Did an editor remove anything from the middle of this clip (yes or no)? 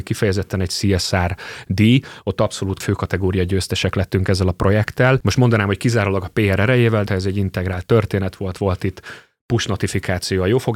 yes